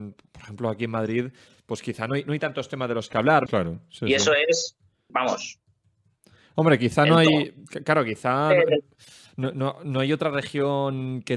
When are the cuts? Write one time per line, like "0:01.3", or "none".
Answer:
0:03.5
0:05.1